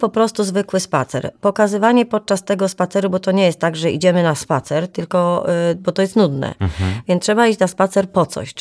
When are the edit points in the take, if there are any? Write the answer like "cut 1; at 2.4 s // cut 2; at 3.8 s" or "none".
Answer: none